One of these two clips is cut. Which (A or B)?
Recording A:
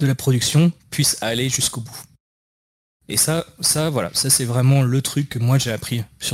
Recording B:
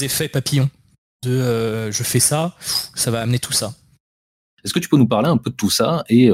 B